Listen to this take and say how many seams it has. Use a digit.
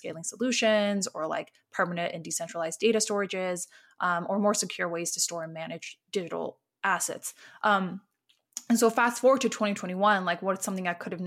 0